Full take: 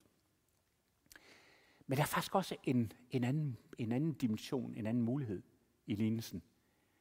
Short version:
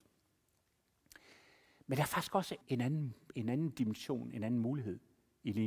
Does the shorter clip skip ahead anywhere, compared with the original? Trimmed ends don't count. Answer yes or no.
yes